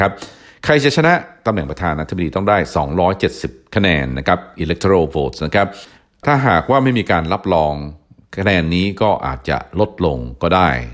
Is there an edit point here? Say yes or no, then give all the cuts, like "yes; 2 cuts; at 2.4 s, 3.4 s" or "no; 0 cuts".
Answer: no; 0 cuts